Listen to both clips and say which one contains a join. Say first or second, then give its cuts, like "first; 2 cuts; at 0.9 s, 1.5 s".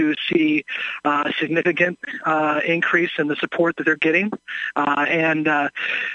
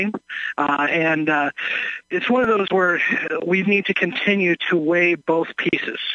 second; 2 cuts; at 2.0 s, 3.6 s